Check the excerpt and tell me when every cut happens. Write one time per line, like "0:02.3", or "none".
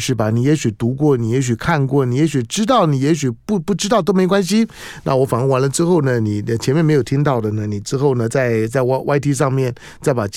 none